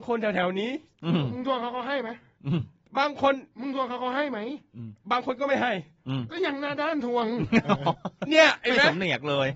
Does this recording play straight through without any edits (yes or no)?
no